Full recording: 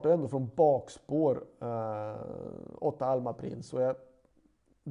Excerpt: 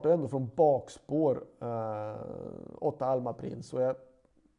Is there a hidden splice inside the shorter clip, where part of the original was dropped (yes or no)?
no